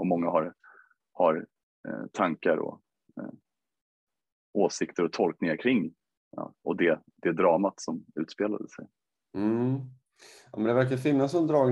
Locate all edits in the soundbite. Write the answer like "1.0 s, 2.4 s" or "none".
6.5 s